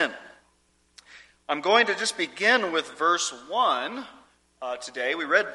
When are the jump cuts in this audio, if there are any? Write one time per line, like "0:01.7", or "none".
none